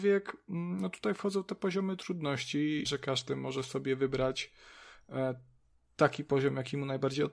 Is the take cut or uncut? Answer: cut